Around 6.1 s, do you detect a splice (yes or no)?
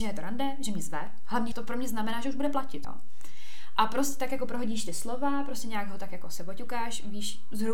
no